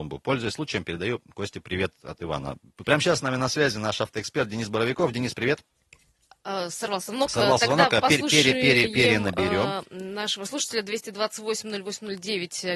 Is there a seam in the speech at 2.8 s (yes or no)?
yes